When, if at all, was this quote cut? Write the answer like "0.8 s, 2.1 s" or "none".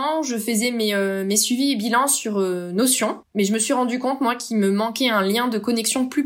none